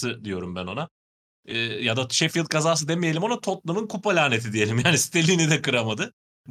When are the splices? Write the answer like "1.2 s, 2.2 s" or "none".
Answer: none